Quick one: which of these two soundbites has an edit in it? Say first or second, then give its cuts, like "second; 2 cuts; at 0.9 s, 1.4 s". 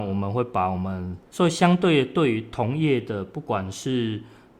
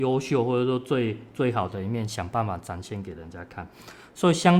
first; 1 cut; at 1.3 s